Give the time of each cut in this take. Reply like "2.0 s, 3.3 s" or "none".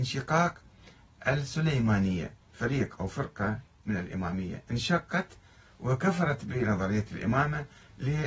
2.4 s